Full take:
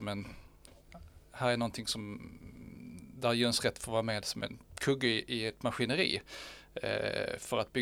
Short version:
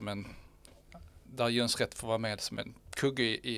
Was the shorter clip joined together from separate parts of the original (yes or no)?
yes